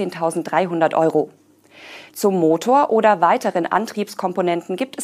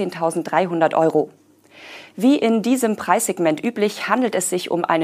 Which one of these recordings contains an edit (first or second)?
first